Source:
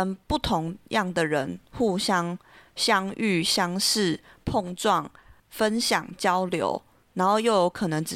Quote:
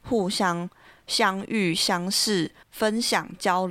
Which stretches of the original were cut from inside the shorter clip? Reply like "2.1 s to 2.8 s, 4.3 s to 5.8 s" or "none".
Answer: 4.3 s to 5.4 s